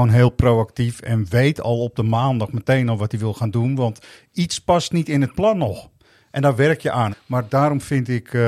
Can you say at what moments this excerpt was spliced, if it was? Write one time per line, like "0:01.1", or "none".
0:07.1